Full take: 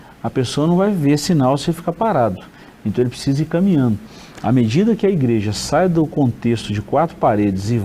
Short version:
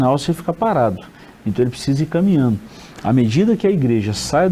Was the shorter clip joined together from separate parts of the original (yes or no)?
no